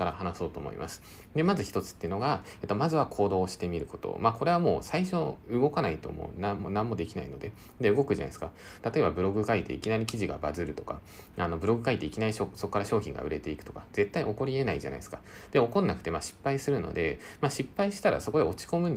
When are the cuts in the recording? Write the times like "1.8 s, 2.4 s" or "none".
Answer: 8.8 s